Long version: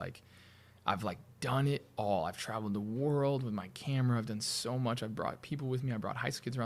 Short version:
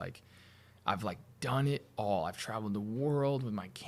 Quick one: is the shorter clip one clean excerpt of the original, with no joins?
yes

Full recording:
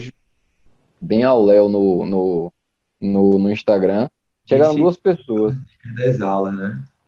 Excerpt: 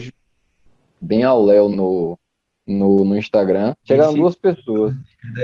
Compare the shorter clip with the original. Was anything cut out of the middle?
yes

